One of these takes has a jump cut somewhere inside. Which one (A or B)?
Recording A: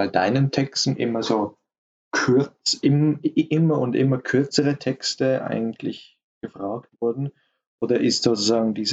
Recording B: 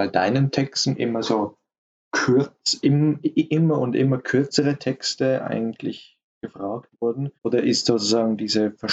B